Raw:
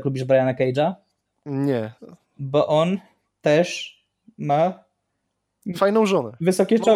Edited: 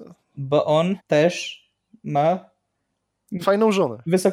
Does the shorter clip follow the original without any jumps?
no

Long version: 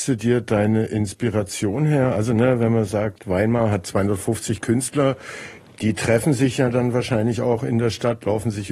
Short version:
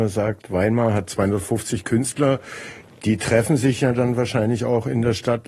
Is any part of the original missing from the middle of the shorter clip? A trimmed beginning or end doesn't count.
no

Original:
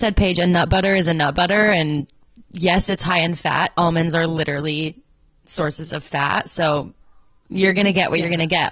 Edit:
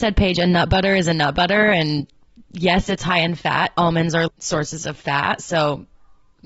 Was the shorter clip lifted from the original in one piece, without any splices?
no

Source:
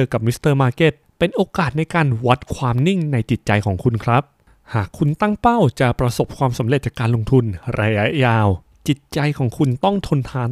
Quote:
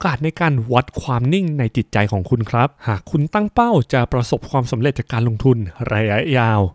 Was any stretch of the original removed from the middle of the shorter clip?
yes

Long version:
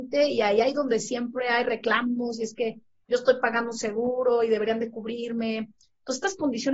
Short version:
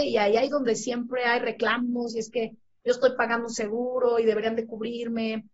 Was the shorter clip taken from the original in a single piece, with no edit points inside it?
yes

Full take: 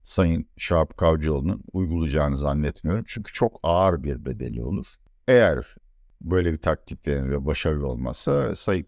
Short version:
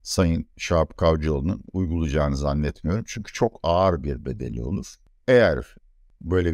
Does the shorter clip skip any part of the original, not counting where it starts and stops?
no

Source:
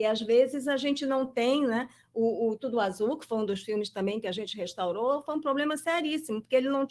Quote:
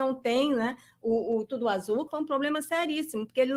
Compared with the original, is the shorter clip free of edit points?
no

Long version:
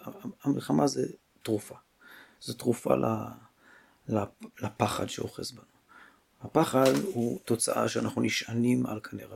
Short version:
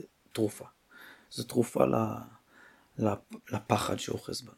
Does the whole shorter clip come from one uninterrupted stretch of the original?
yes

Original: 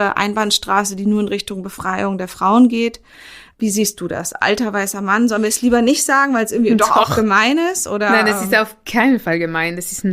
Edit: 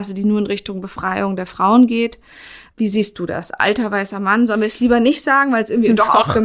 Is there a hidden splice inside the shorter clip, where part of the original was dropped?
no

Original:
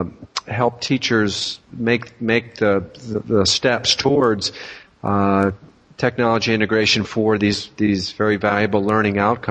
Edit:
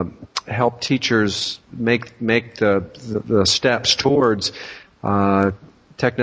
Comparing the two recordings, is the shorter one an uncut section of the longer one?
yes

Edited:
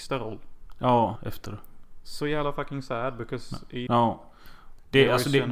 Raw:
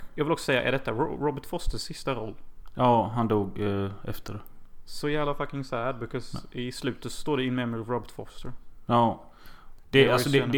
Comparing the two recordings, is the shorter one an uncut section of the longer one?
no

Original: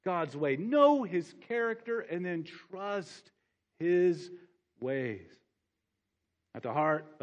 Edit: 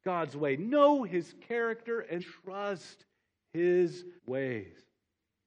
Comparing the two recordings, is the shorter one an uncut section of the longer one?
no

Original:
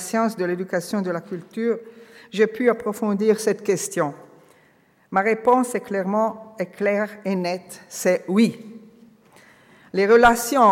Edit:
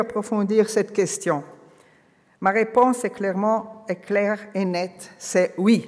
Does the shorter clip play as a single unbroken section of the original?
yes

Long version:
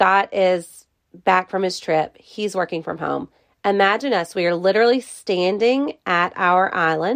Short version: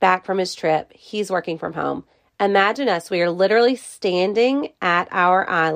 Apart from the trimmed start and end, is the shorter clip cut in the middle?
no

